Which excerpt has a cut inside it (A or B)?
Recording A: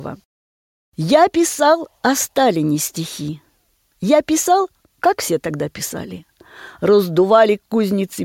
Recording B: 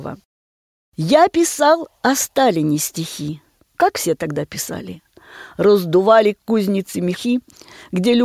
B